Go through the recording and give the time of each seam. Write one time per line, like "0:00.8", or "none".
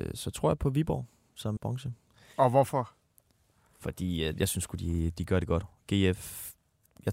0:01.6